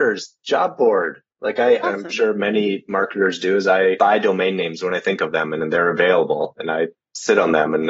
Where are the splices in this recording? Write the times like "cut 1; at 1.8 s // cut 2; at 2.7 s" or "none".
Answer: cut 1; at 1.8 s